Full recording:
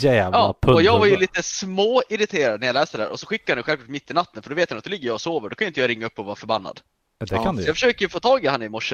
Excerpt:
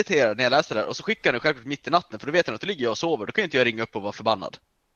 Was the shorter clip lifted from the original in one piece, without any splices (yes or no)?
yes